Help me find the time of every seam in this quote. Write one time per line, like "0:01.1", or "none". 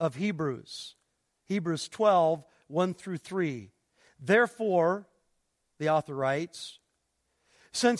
none